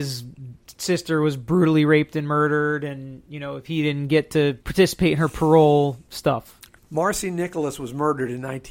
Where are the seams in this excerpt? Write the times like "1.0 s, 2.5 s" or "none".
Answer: 4.6 s, 6.8 s